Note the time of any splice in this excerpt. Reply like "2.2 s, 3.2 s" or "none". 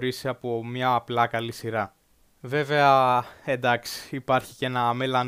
none